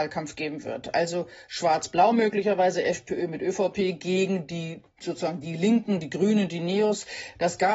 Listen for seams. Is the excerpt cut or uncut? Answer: uncut